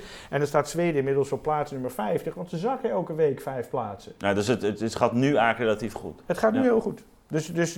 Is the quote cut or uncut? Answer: uncut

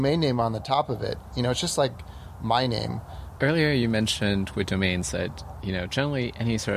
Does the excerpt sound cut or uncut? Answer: cut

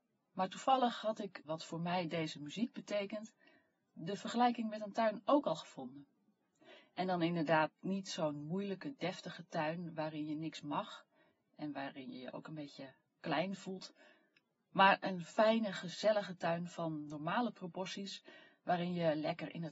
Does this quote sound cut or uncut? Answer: cut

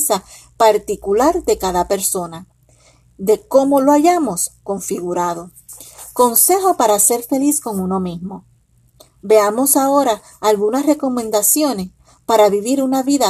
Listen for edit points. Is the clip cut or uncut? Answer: uncut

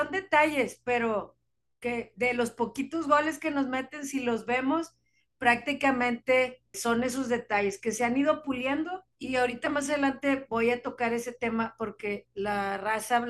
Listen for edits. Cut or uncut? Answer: cut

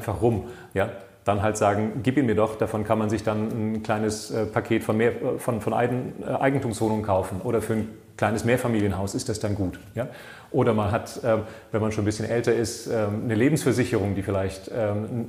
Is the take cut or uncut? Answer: uncut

